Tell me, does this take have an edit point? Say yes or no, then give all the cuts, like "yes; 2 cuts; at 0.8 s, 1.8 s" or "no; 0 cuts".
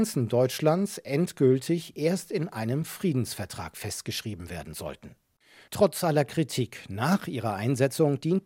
no; 0 cuts